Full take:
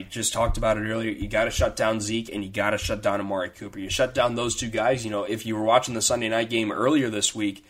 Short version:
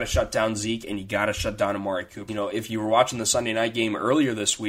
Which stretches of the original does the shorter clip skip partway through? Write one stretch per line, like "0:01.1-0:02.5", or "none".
0:03.7-0:05.0